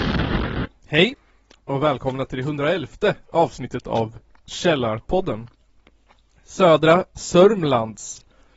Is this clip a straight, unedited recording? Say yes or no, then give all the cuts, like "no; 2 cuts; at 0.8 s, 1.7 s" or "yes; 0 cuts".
yes; 0 cuts